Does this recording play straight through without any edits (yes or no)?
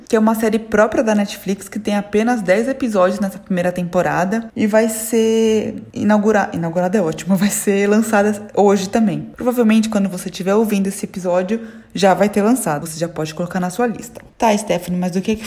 no